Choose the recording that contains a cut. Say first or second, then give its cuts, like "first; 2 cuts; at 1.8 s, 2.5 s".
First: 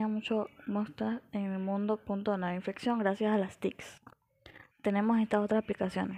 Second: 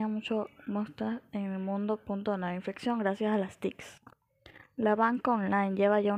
first; 1 cut; at 4.7 s